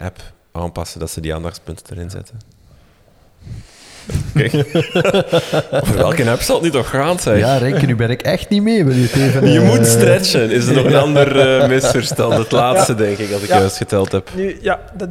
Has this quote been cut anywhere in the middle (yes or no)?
no